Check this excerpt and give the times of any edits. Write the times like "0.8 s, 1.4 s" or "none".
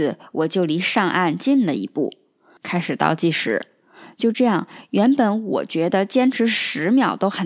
2.6 s